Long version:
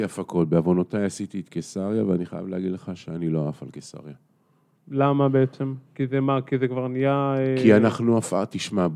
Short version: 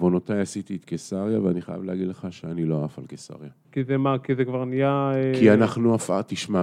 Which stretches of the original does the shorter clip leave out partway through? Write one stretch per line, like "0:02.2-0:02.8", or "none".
0:04.3-0:05.9